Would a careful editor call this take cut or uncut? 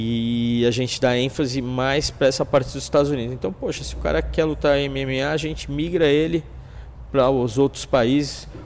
uncut